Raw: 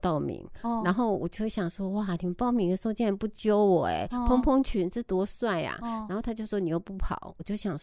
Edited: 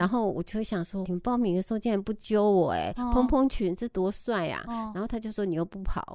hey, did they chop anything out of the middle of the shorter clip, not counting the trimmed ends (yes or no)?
yes